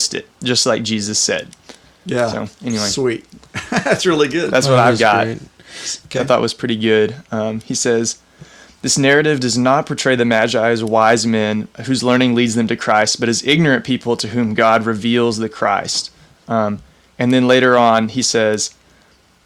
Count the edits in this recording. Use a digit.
1